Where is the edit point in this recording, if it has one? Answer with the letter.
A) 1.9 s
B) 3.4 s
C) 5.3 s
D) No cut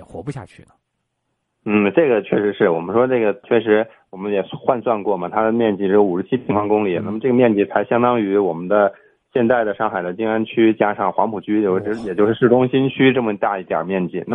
B